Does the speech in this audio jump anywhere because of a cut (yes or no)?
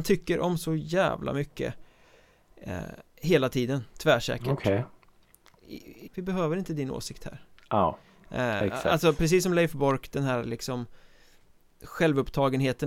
yes